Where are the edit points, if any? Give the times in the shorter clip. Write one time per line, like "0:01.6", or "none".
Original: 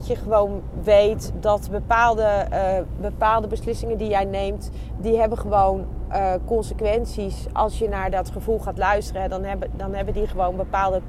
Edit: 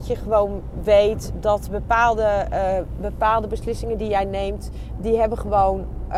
none